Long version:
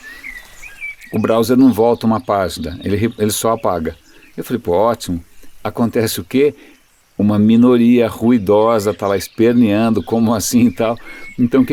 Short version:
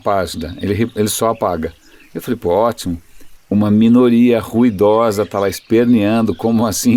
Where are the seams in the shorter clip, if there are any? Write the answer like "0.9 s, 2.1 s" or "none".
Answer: 3.4 s